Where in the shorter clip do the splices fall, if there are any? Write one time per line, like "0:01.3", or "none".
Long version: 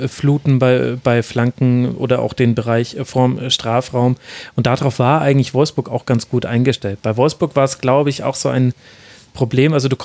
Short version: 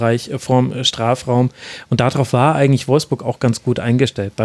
none